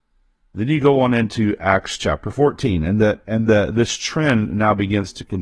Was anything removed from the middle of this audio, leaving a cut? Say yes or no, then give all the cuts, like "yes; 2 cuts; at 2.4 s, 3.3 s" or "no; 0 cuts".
no; 0 cuts